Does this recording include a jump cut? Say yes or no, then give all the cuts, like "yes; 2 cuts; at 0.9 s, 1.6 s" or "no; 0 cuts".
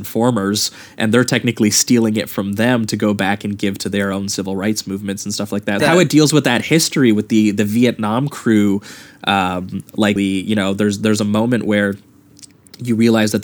yes; 2 cuts; at 5.8 s, 10.2 s